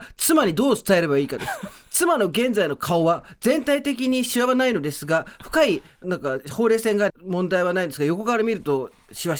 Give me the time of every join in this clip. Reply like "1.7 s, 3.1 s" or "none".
6.0 s, 7.1 s